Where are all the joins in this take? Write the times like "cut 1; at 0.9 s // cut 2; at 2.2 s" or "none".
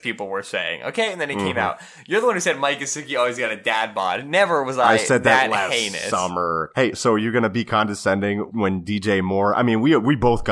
cut 1; at 6.7 s // cut 2; at 8.5 s